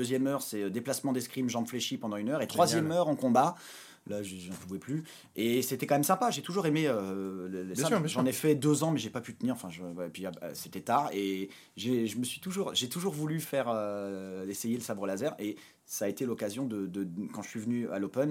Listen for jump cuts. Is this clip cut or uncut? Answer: uncut